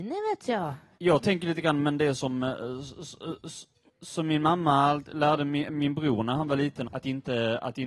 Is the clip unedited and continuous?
no; 2 cuts; at 0.9 s, 6.8 s

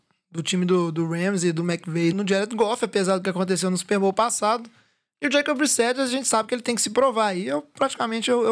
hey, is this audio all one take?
no; 1 cut; at 2.1 s

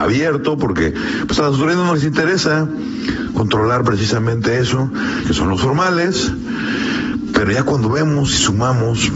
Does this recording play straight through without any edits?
no; 1 cut; at 5.2 s

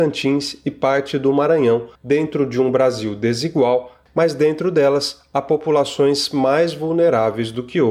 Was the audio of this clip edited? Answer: yes; 2 cuts; at 2.0 s, 4.1 s

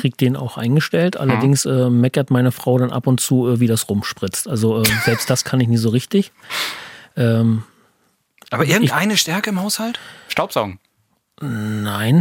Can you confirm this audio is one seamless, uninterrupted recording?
yes; 0 cuts

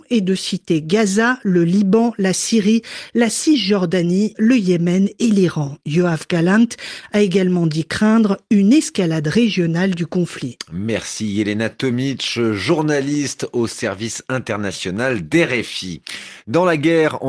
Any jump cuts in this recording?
yes; 1 cut; at 4.3 s

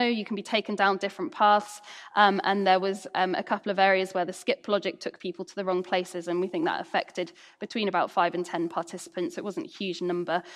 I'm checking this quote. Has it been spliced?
no; 0 cuts

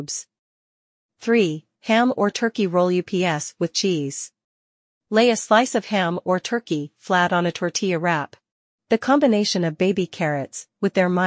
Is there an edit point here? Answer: yes; 3 cuts; at 1.8 s, 4.9 s, 8.8 s

